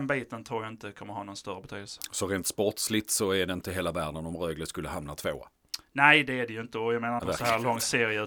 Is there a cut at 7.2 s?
yes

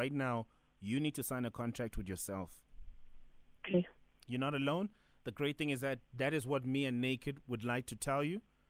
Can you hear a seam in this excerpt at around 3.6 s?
yes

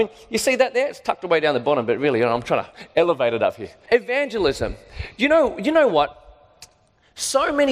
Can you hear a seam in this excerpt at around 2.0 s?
no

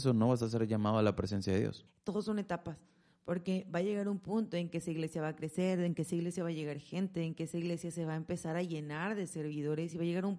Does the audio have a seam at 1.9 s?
yes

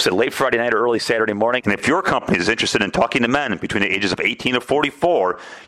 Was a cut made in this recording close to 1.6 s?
yes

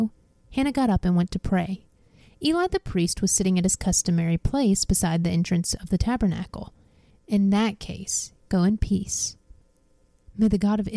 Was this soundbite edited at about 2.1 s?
no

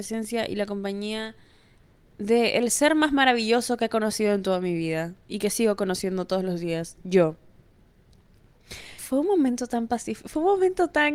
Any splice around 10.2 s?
no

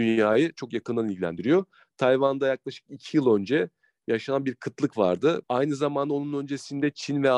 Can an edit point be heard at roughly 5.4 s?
yes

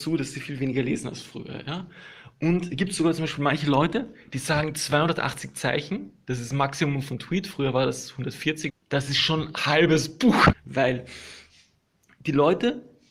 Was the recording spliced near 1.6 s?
no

